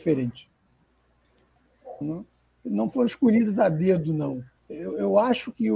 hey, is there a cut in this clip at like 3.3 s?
no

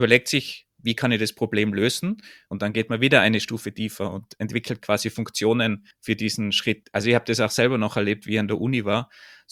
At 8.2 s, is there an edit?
no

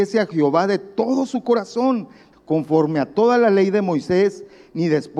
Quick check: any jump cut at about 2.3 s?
yes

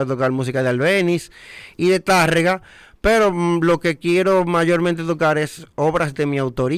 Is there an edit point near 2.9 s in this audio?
no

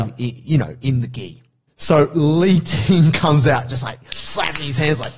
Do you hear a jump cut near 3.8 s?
no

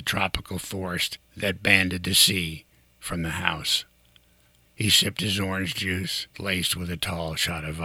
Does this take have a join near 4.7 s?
yes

